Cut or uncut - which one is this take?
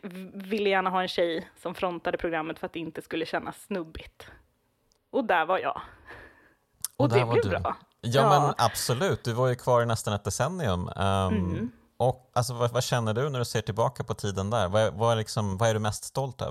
cut